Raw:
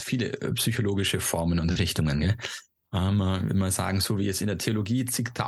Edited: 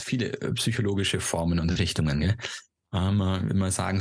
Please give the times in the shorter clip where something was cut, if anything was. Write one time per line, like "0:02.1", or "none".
none